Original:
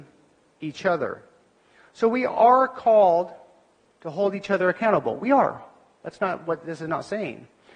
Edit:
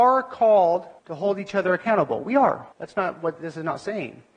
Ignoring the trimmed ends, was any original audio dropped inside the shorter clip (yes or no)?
yes